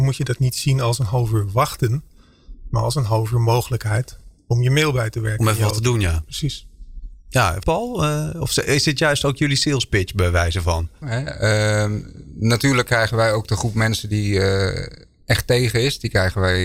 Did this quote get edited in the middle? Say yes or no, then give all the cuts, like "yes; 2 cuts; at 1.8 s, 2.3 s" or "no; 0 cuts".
yes; 2 cuts; at 7.6 s, 11.0 s